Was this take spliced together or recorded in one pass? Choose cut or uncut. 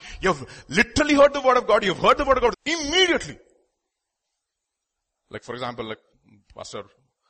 cut